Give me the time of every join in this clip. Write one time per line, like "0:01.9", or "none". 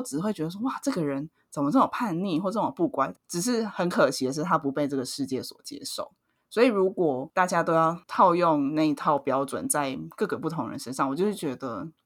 0:03.1